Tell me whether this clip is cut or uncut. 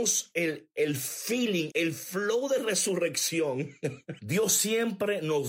cut